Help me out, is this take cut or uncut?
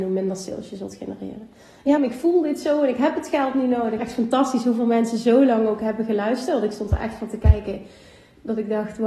cut